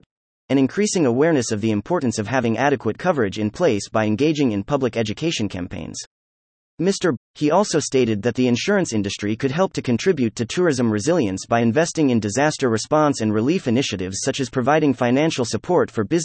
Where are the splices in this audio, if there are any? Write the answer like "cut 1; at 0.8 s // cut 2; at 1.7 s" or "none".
cut 1; at 7.2 s